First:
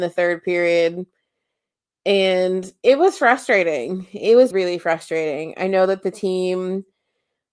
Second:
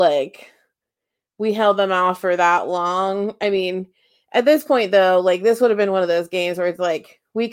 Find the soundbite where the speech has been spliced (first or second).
first